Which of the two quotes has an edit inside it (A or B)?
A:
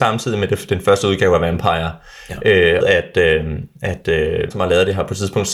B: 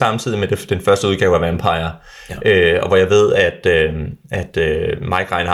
A